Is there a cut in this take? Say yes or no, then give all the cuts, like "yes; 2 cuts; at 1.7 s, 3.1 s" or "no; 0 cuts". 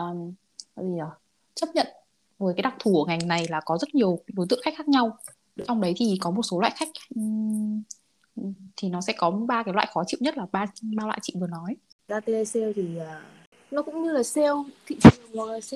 no; 0 cuts